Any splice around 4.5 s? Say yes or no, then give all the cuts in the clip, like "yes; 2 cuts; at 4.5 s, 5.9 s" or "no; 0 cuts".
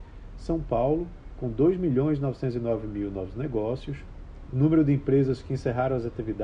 yes; 1 cut; at 4.5 s